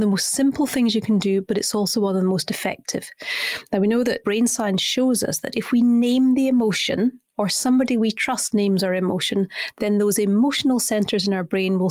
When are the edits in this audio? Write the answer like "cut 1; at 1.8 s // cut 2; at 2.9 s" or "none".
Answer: none